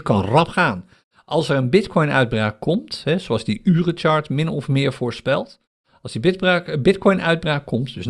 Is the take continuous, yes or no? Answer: yes